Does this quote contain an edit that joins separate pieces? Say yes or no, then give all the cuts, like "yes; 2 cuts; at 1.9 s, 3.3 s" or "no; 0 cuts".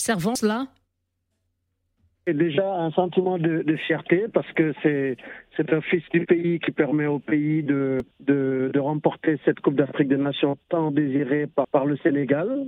yes; 2 cuts; at 8.1 s, 11.6 s